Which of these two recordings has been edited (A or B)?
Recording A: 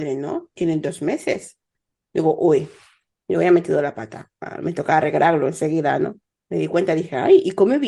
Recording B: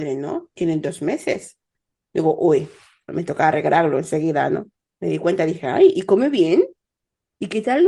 B